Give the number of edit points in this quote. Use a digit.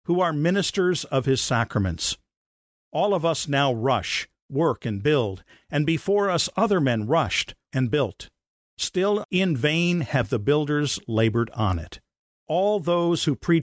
3